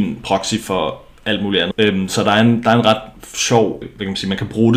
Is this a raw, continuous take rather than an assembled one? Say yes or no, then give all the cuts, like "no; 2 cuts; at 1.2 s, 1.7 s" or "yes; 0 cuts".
no; 2 cuts; at 1.7 s, 3.8 s